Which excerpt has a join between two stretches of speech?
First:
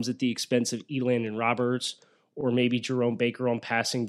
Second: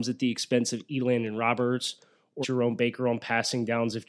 second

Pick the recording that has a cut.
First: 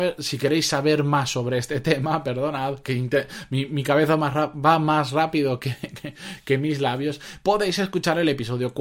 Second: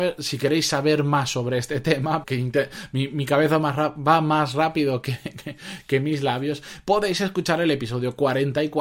second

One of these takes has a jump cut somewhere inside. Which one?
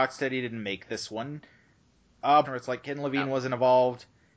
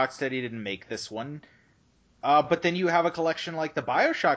first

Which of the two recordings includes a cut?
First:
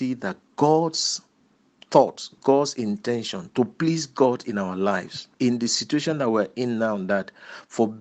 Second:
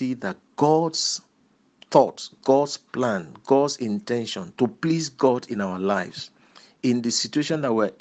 first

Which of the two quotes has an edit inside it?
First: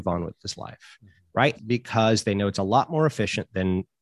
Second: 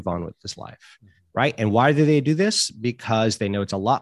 first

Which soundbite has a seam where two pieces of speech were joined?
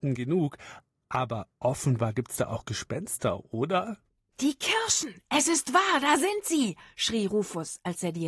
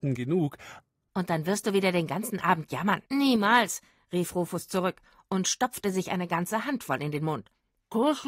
second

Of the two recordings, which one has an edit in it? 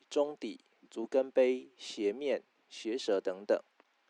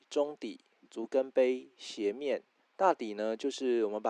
second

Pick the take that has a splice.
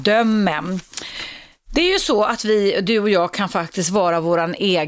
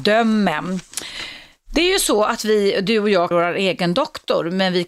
second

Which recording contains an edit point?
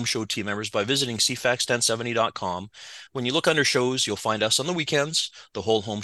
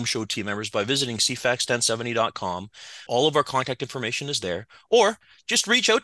second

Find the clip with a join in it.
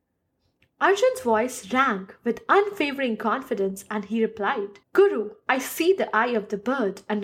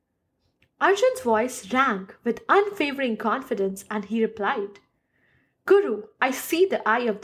first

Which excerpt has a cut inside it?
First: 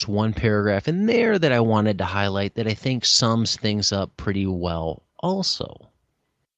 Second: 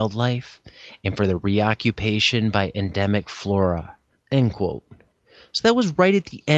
second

